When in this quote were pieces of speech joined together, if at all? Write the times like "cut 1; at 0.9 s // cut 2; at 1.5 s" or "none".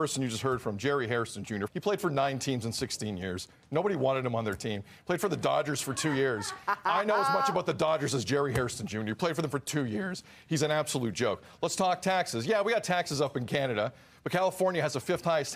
cut 1; at 1.7 s